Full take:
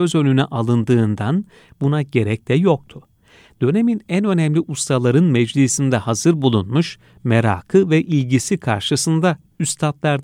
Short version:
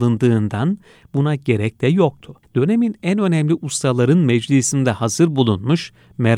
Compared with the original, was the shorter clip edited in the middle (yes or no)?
yes